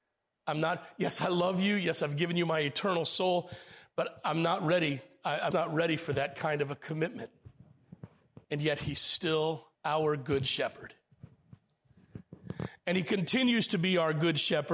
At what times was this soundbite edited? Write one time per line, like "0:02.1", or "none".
0:05.5
0:08.4
0:09.7